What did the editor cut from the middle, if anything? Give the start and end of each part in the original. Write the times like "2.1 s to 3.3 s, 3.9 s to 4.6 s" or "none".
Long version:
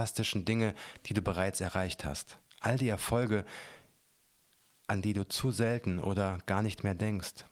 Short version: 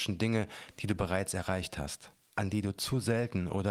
2.5 s to 4.7 s